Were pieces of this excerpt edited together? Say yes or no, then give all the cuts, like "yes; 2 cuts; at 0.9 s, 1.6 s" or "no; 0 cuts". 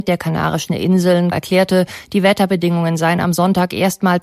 yes; 1 cut; at 1.3 s